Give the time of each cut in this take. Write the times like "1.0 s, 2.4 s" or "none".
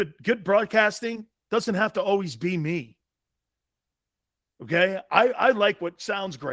none